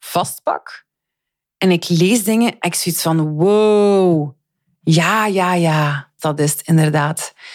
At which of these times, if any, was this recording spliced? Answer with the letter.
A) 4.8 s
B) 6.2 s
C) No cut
B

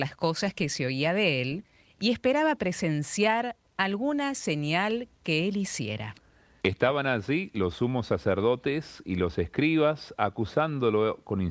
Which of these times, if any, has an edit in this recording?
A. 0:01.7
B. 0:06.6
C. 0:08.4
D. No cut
B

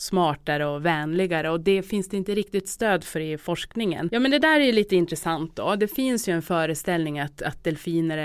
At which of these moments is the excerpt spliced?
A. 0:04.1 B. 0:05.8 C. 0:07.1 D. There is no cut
A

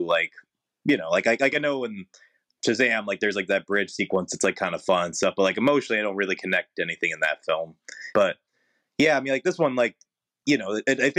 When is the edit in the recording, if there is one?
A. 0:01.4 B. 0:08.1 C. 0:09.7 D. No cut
B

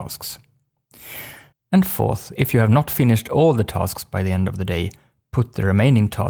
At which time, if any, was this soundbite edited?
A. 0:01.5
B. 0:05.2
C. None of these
A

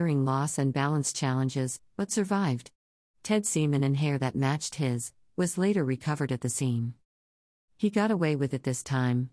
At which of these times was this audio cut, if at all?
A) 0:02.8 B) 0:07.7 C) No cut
C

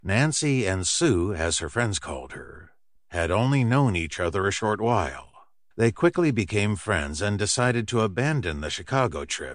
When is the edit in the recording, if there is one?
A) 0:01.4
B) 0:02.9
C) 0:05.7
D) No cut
C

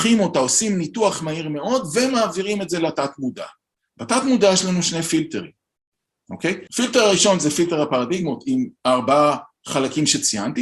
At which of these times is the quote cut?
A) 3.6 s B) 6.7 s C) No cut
B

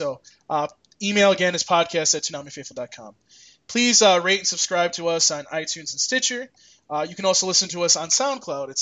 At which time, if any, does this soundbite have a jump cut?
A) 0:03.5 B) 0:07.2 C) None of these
C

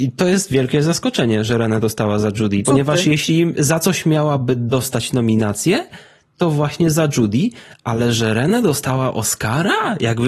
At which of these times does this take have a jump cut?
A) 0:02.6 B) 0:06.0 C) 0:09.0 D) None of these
A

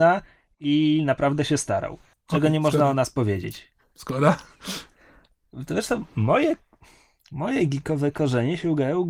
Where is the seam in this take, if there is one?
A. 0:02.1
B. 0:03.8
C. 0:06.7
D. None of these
D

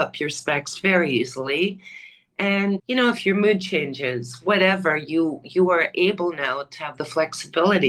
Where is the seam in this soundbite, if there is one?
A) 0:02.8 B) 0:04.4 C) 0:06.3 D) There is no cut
A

